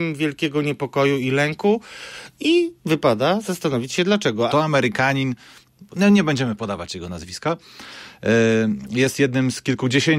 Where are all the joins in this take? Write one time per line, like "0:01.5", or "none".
0:04.5